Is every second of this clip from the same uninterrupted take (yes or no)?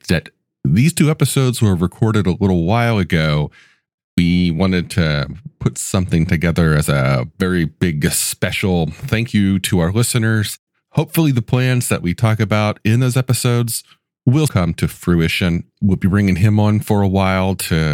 no